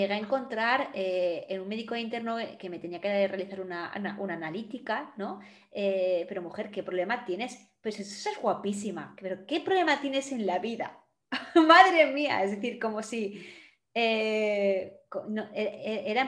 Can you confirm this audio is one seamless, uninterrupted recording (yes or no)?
yes